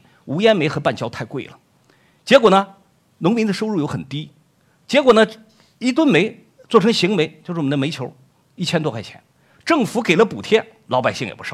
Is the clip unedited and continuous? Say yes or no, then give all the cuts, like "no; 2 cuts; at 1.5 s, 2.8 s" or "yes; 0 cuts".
yes; 0 cuts